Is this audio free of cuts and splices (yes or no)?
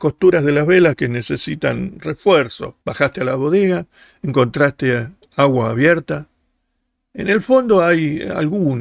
no